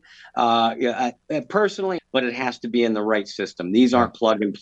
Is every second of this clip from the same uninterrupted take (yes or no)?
no